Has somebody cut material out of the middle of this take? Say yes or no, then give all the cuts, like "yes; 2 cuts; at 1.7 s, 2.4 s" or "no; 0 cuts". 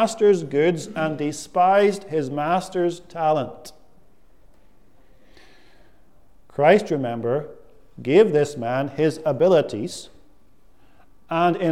no; 0 cuts